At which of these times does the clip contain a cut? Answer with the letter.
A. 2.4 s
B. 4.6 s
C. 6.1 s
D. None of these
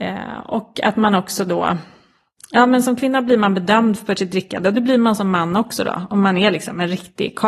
D